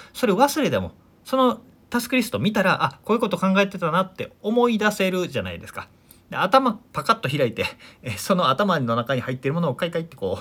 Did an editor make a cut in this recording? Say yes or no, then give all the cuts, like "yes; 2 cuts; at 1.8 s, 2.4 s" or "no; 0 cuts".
no; 0 cuts